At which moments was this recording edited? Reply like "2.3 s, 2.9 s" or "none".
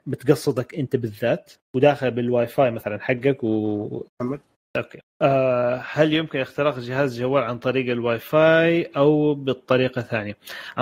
4.1 s